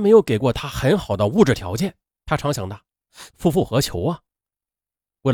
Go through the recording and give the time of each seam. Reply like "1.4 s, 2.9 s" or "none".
2.2 s, 3.3 s

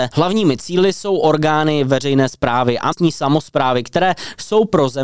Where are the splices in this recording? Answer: 2.9 s

